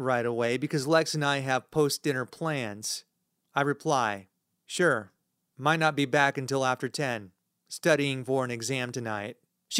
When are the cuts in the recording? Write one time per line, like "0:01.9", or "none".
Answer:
none